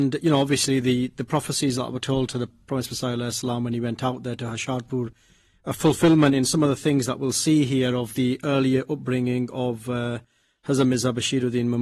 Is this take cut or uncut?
uncut